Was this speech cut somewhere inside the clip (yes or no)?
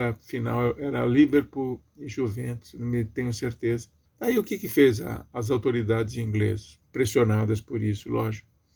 yes